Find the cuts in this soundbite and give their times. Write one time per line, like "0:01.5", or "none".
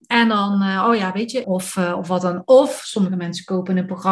0:01.4

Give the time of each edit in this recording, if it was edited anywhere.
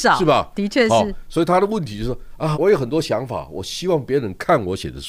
0:02.5

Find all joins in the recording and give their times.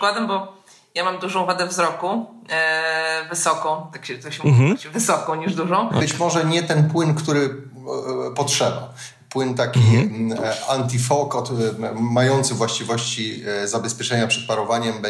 0:06.0

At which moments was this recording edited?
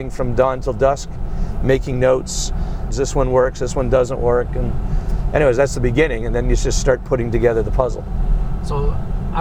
0:02.9

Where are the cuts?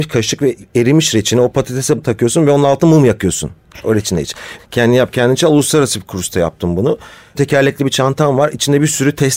0:04.6
0:07.4

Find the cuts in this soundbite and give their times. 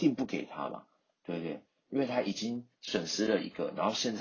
none

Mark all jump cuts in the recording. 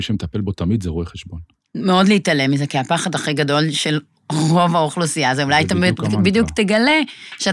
0:01.7

